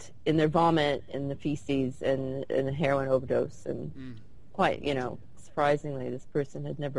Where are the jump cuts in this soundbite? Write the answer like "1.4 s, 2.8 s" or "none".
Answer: 5.4 s